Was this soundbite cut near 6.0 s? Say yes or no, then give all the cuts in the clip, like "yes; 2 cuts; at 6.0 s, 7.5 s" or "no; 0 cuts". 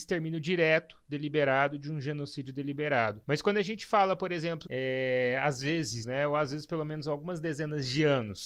yes; 2 cuts; at 4.7 s, 6.0 s